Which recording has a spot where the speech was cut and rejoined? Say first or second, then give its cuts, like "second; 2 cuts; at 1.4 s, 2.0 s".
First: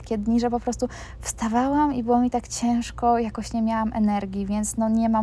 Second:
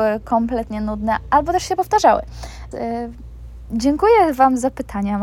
second; 1 cut; at 2.7 s